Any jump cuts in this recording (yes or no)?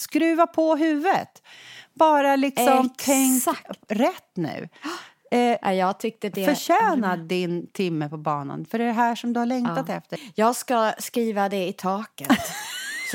no